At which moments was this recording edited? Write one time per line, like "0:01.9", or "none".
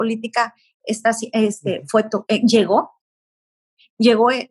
none